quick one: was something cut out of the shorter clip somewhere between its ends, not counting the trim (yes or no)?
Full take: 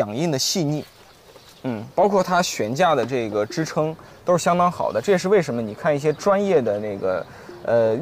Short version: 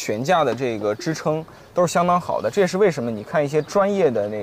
no